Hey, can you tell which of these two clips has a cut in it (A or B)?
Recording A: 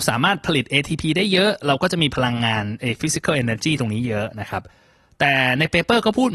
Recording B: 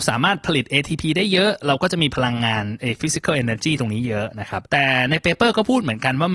B